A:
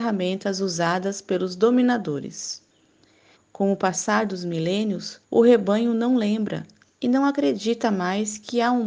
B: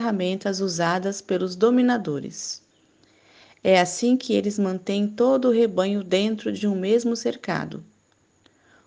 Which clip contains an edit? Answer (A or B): A